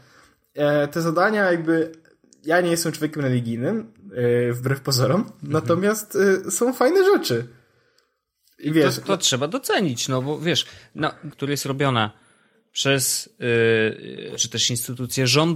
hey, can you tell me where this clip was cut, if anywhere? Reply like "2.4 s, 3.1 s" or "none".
11.3 s, 14.4 s